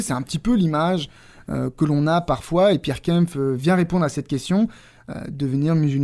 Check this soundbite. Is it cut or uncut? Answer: uncut